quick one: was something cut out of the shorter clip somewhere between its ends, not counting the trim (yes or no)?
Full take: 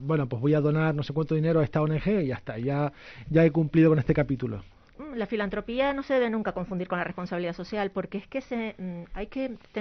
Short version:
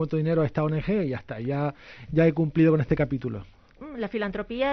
no